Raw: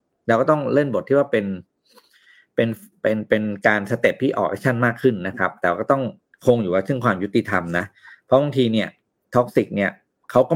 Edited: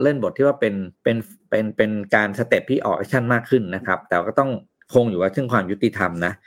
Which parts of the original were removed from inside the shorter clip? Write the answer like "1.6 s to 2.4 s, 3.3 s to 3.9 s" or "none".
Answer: 1.7 s to 2.5 s